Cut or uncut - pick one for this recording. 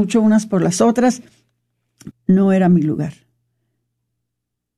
cut